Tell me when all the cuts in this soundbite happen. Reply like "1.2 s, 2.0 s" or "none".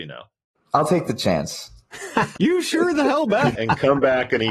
2.4 s, 3.6 s